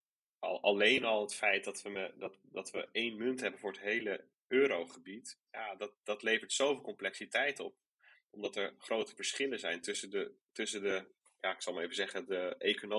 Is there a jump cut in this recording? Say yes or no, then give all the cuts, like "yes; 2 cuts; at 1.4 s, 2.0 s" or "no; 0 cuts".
no; 0 cuts